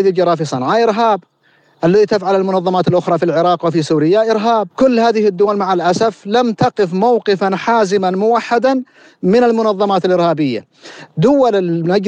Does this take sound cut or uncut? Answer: cut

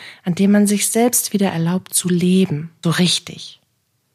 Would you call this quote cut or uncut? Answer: cut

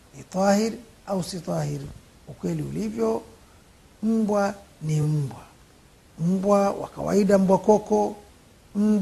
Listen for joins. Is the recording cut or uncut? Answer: uncut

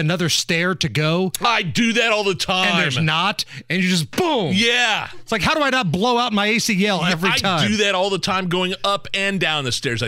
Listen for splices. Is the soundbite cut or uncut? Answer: uncut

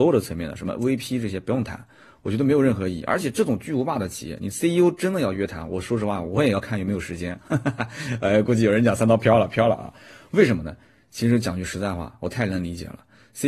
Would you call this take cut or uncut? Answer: uncut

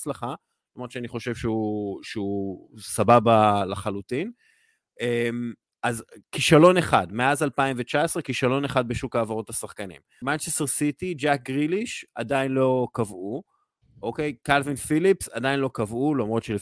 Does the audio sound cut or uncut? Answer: cut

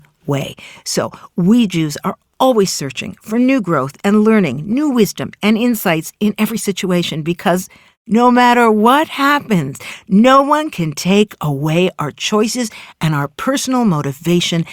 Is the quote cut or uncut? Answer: uncut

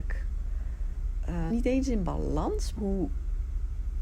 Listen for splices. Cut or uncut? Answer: cut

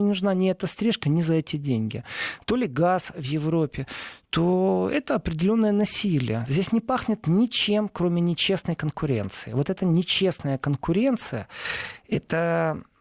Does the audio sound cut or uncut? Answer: uncut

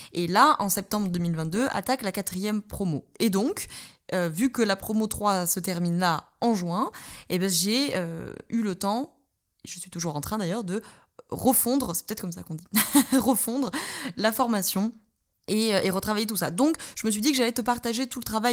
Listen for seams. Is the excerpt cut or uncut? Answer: uncut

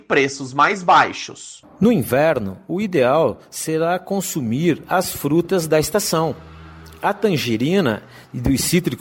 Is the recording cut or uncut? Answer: uncut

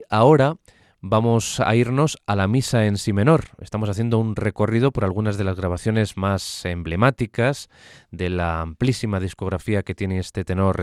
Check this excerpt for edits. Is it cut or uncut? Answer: uncut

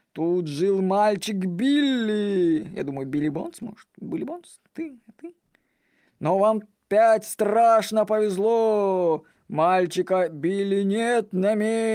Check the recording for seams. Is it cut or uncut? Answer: uncut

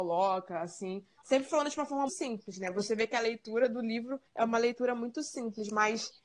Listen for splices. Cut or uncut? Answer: cut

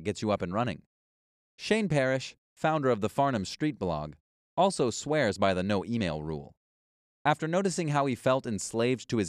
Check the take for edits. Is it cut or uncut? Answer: uncut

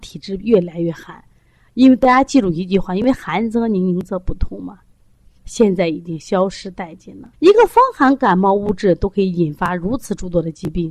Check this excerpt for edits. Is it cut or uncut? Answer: cut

